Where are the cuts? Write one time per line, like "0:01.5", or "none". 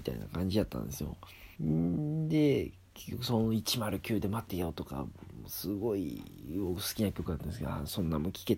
0:01.5
0:04.5